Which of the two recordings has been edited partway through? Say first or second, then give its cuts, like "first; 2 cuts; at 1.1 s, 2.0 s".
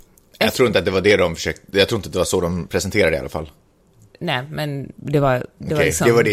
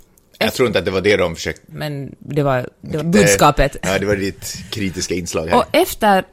second; 2 cuts; at 1.7 s, 3.0 s